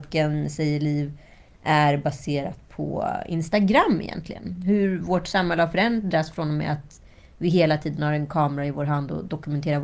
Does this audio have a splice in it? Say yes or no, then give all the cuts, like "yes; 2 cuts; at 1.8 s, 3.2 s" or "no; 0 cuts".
no; 0 cuts